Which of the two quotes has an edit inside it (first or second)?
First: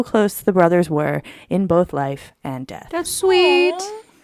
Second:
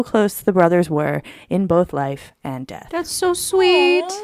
first